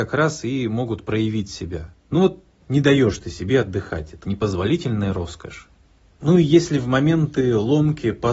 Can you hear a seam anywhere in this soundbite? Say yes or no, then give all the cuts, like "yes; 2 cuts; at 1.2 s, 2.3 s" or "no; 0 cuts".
yes; 1 cut; at 4.2 s